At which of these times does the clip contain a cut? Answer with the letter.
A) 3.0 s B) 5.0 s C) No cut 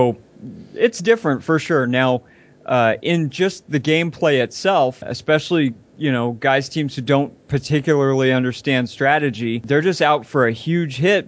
B